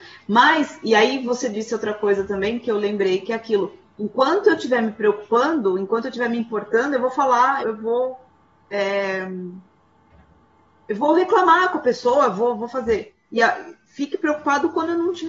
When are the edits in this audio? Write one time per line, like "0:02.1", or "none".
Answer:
0:07.6